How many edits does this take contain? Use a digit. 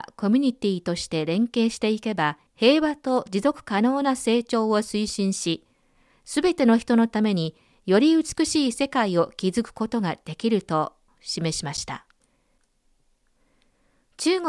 1